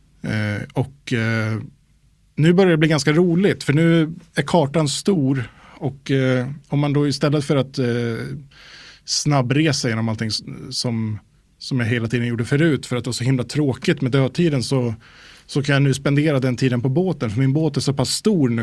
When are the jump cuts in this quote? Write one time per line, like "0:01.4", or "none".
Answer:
none